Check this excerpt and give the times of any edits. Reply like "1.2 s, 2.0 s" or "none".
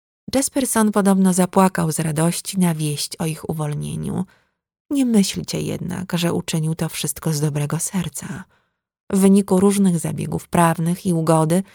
none